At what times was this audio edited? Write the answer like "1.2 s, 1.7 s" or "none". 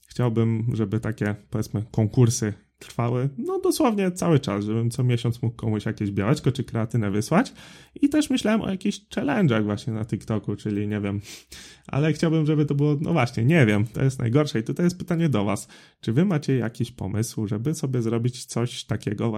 none